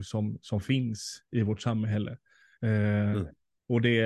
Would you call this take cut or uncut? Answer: cut